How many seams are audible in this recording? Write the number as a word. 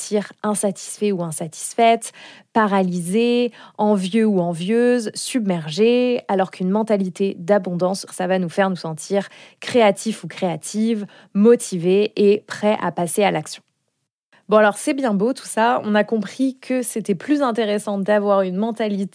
one